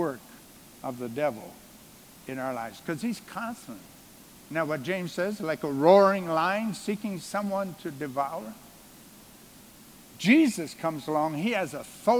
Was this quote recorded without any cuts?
yes; 0 cuts

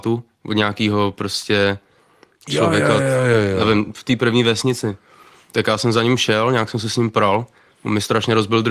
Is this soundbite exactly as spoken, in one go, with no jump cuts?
yes; 0 cuts

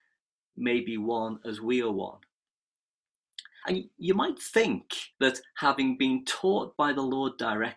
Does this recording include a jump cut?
yes; 2 cuts; at 3.6 s, 5.1 s

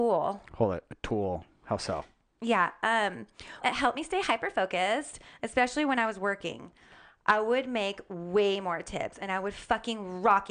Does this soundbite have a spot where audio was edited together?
yes; 1 cut; at 3.6 s

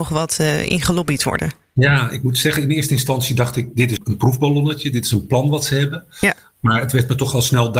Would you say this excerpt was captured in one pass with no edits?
no; 1 cut; at 4.0 s

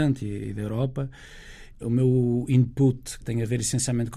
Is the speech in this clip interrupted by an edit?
yes; 2 cuts; at 1.8 s, 3.2 s

